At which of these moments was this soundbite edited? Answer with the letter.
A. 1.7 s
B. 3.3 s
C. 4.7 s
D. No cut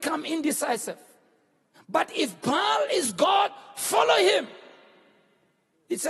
A